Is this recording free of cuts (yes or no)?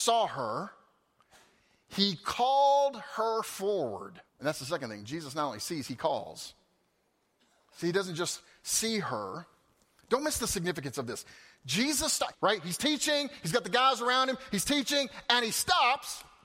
no